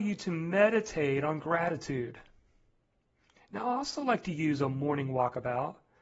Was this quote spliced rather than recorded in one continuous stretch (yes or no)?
no